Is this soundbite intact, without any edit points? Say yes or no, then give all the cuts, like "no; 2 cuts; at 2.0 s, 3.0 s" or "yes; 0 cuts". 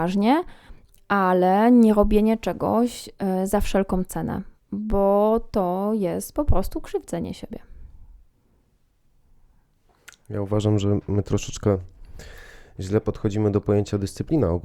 yes; 0 cuts